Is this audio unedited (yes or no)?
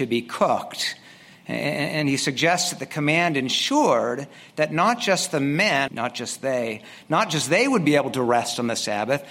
no